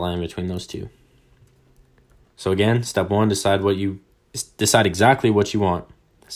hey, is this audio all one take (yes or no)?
no